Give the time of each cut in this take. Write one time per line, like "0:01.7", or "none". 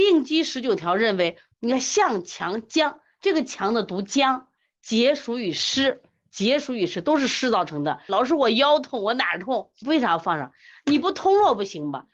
0:01.5
0:08.1
0:09.8

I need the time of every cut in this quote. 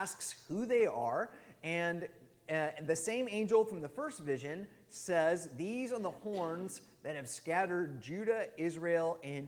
none

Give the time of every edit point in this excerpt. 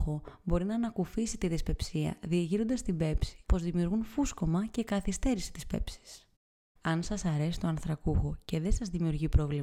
0:03.4

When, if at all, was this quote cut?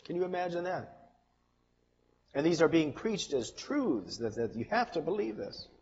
0:02.2
0:04.3

